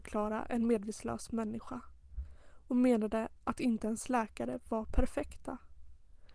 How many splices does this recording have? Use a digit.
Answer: 0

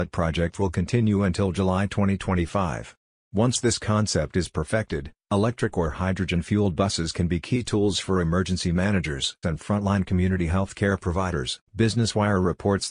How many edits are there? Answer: 2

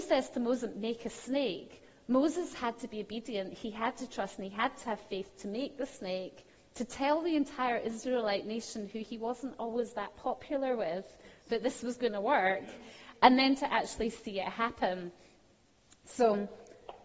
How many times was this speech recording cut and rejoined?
0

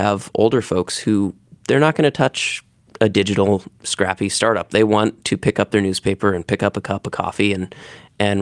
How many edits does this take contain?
0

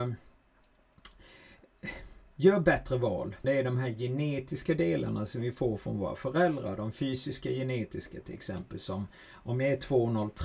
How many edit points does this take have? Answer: 1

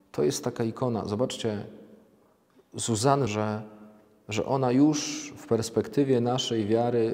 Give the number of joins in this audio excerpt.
1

